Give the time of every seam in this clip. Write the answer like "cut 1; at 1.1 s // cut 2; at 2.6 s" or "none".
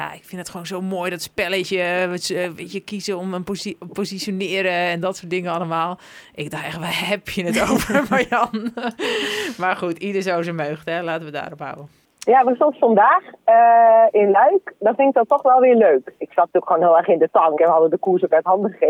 cut 1; at 17.6 s